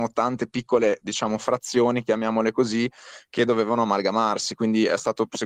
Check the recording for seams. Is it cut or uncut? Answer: uncut